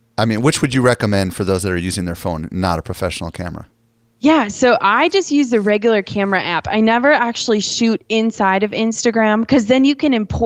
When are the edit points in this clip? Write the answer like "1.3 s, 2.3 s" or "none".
none